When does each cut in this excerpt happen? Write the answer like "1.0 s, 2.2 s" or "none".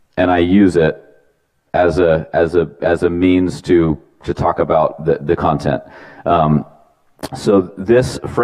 none